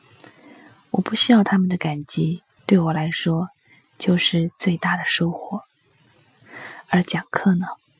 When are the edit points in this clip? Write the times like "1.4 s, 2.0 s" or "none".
2.6 s